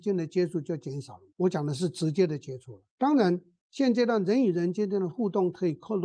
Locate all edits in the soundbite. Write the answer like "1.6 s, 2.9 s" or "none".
1.3 s, 2.9 s